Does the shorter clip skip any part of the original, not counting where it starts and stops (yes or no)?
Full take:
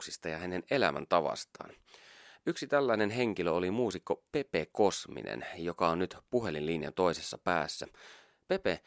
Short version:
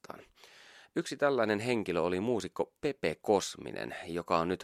no